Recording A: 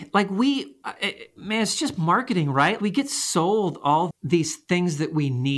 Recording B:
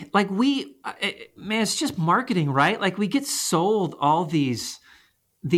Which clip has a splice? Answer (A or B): A